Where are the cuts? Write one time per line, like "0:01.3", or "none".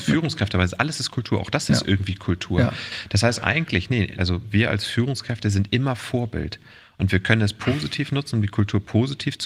0:04.2